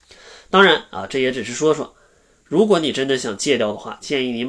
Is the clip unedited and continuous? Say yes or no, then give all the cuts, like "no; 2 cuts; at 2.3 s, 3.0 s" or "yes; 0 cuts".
yes; 0 cuts